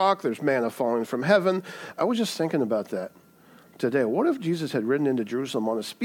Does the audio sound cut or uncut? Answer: cut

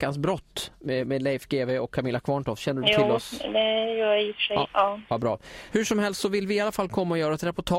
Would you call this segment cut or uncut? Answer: uncut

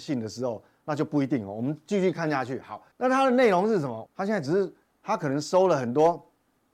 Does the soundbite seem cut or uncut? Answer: cut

